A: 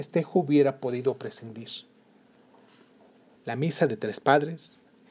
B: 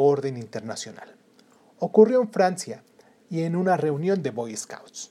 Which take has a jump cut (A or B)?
A